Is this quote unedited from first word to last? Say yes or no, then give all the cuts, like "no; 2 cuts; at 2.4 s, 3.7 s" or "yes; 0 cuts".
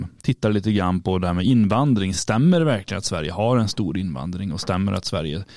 yes; 0 cuts